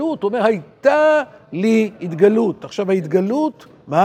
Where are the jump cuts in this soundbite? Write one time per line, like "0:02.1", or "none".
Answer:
none